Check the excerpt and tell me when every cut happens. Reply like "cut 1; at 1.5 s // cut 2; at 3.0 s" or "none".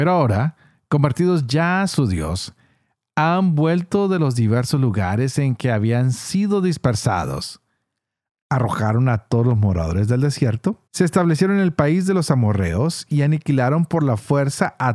cut 1; at 8.4 s // cut 2; at 10.9 s